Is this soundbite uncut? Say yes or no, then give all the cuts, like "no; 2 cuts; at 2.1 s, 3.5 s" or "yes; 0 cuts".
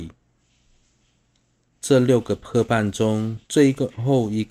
no; 1 cut; at 3.5 s